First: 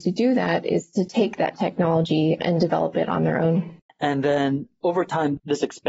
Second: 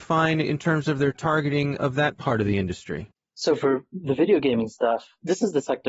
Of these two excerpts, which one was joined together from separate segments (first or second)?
first